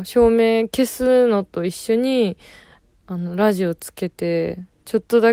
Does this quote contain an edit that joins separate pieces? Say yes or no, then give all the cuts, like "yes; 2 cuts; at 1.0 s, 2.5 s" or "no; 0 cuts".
no; 0 cuts